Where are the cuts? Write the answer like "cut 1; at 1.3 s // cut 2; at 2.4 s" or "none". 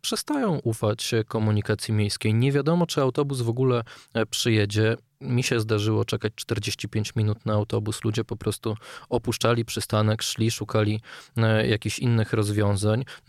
none